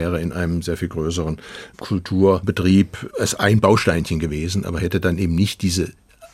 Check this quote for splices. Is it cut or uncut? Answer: uncut